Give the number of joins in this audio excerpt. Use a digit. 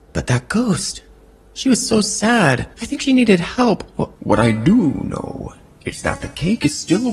2